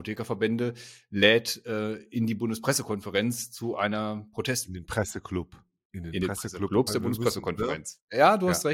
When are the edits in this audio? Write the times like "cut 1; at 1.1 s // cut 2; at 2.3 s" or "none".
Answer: cut 1; at 6.9 s

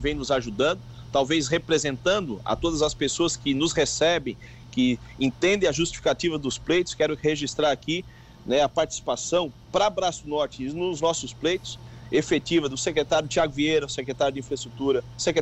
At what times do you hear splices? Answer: none

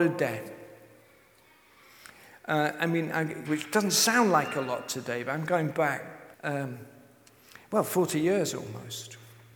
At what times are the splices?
cut 1; at 3.4 s // cut 2; at 6.3 s

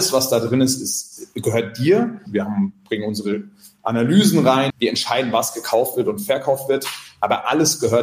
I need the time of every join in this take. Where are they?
cut 1; at 2.3 s // cut 2; at 4.7 s

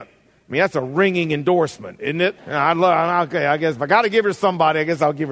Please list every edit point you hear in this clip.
cut 1; at 2.4 s

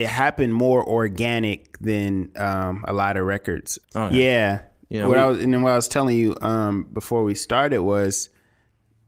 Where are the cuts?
cut 1; at 3.8 s

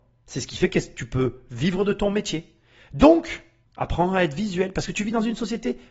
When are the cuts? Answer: cut 1; at 3.6 s

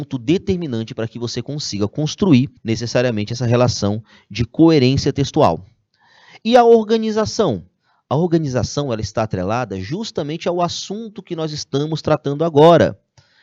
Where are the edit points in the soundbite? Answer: cut 1; at 2.6 s

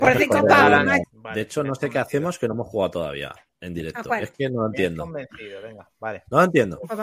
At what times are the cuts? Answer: cut 1; at 1.0 s

